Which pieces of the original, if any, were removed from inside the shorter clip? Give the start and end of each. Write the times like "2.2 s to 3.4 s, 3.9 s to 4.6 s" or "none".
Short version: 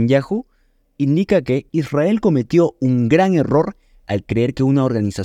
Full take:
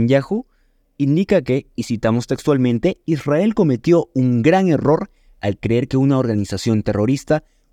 1.7 s to 3.0 s